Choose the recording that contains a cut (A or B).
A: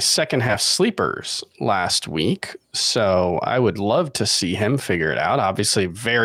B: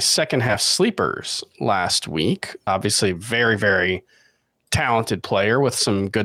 B